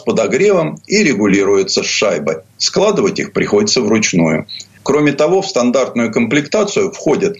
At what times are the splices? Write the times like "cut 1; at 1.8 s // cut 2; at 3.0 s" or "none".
cut 1; at 4.8 s